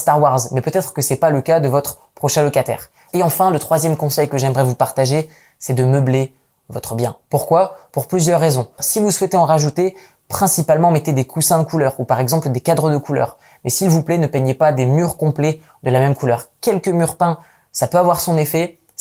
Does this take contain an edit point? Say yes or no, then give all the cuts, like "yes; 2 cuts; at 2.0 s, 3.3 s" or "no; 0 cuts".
yes; 2 cuts; at 3.1 s, 8.8 s